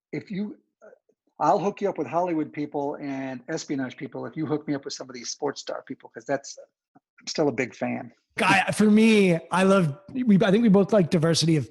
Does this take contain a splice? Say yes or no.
yes